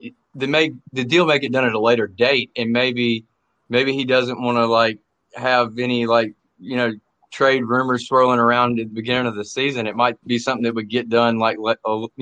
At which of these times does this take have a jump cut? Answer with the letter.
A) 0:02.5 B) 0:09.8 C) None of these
A